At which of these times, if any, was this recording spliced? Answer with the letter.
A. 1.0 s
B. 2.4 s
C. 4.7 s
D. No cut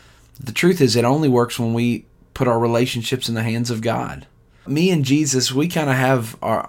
C